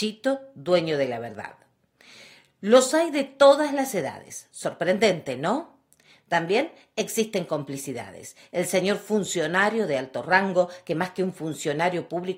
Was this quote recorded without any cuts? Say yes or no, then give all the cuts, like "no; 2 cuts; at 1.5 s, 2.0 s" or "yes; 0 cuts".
yes; 0 cuts